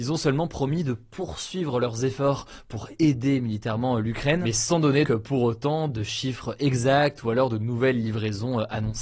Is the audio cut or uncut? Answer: cut